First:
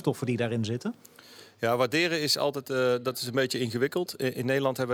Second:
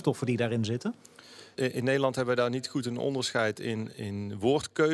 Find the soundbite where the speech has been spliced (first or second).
second